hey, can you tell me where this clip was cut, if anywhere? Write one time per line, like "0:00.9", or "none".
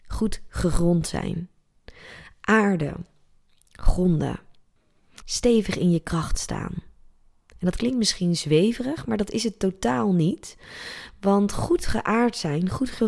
0:05.2